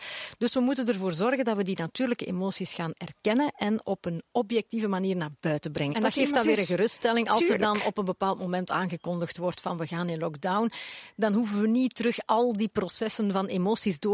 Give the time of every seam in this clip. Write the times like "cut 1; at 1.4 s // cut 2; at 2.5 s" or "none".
cut 1; at 5.9 s